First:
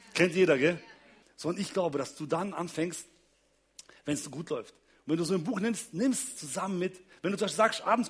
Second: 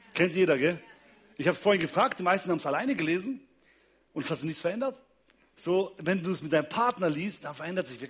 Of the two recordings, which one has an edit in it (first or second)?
first